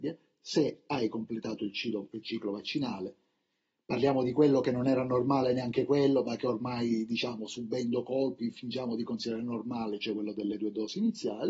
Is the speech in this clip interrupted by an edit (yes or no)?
no